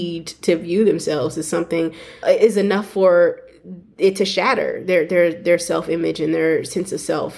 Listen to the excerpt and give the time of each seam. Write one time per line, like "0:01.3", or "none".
0:02.2